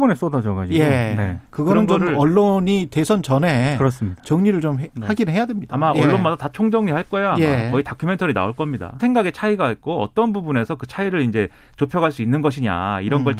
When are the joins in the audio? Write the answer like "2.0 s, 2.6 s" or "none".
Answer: 9.0 s